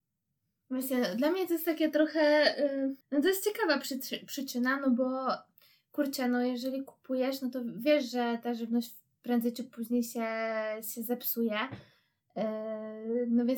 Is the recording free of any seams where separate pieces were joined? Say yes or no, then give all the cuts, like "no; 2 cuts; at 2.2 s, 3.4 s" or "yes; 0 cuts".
no; 1 cut; at 3.0 s